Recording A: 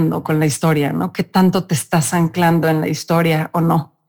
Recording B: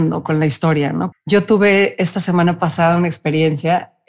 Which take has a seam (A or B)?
B